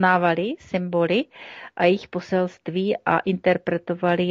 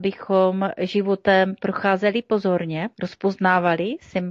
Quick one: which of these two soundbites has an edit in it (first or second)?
second